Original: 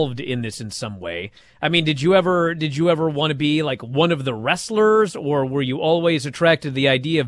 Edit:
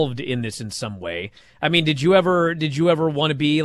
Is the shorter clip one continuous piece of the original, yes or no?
yes